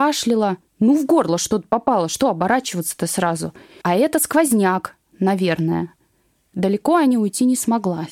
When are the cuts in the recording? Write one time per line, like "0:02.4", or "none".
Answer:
0:03.8